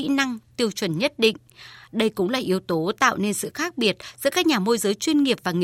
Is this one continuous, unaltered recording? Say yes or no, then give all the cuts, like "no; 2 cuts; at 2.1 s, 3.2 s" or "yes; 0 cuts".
yes; 0 cuts